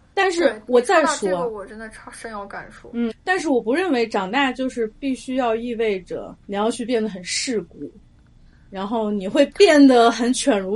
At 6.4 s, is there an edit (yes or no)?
yes